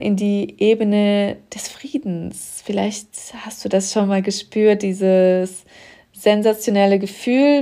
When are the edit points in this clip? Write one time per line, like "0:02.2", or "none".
none

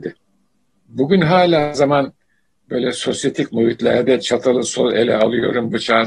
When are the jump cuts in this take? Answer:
0:01.7

